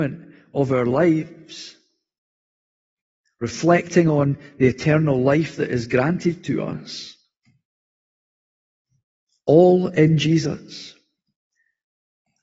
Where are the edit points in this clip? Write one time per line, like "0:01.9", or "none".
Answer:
none